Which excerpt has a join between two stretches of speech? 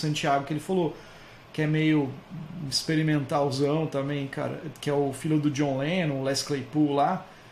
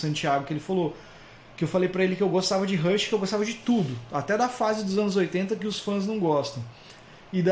first; 1 cut; at 1.4 s

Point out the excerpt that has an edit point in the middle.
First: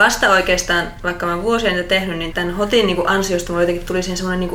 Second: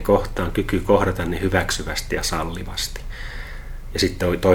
first; 1 cut; at 2.3 s

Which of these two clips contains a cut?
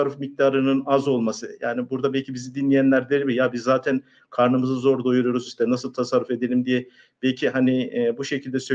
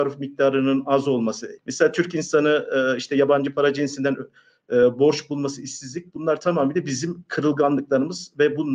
second; 1 cut; at 1.6 s

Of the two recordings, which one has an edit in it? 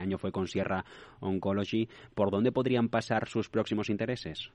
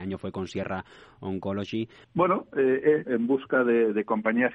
second; 2 cuts; at 2.0 s, 3.0 s

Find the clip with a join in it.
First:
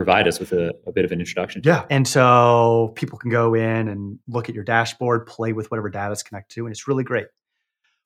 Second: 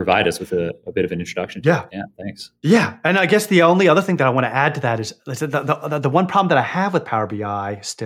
first; 1 cut; at 1.9 s

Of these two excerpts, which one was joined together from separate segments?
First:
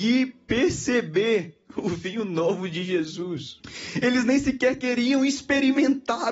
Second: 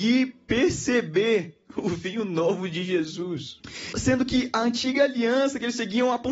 second; 1 cut; at 3.9 s

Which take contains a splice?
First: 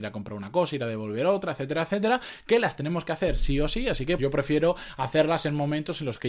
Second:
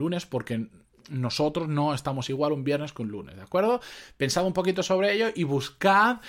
first; 1 cut; at 4.2 s

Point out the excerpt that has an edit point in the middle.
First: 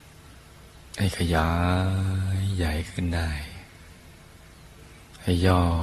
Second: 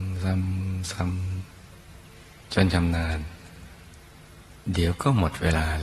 second; 1 cut; at 4.6 s

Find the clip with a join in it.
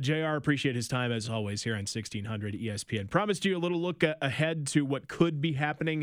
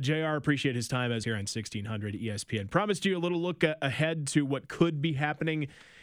second; 1 cut; at 1.2 s

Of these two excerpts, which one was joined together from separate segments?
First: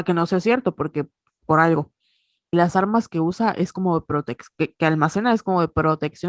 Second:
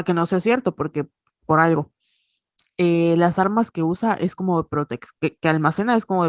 first; 1 cut; at 2.5 s

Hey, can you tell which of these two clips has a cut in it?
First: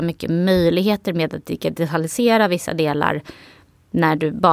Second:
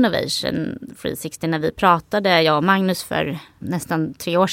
second; 1 cut; at 3.6 s

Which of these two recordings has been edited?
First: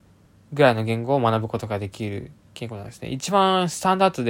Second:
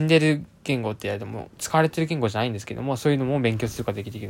second; 1 cut; at 1.5 s

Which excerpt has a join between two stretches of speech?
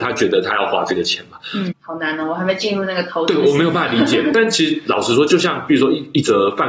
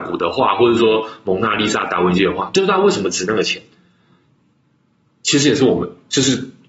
first; 1 cut; at 1.7 s

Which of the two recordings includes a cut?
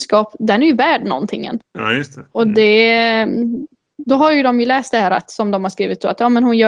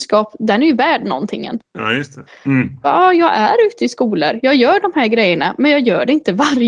second; 1 cut; at 2.3 s

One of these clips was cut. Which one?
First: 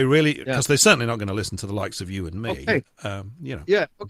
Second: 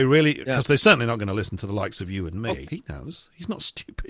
second; 1 cut; at 2.6 s

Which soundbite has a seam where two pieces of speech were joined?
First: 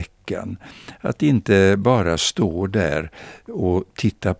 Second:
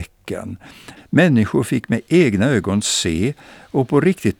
second; 1 cut; at 1.0 s

